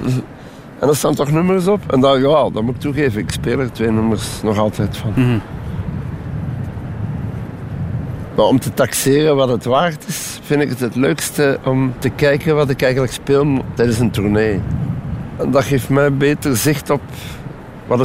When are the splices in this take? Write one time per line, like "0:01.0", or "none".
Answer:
none